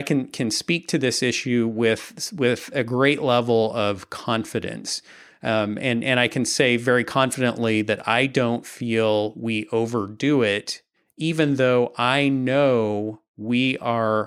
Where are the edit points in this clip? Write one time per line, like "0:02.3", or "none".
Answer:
none